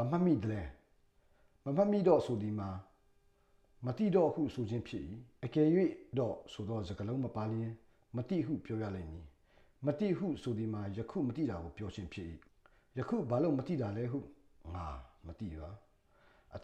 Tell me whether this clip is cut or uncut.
cut